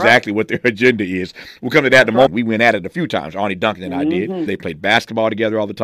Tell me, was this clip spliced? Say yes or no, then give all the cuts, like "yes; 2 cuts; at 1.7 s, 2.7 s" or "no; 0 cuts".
yes; 2 cuts; at 2.3 s, 4.5 s